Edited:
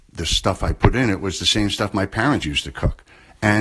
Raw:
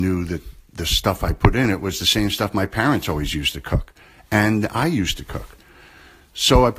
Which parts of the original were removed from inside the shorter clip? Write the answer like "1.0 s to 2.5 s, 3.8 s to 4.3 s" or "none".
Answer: 3.0 s to 3.3 s